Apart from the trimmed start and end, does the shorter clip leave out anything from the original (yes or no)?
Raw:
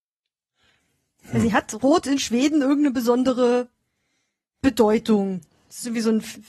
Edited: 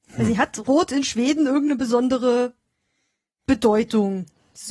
no